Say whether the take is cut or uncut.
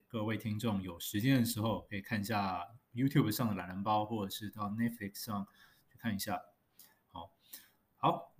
cut